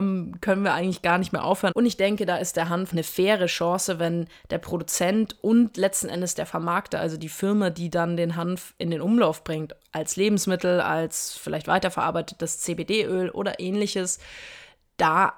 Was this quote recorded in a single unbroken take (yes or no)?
no